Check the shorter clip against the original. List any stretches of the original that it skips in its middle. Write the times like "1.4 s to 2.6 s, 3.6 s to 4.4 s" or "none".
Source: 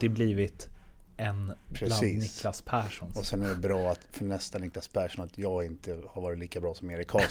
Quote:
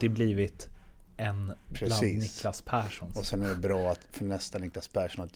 none